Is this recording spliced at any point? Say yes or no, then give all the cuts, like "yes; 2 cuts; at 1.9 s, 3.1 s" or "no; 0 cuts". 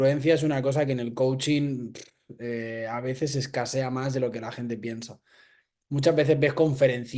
no; 0 cuts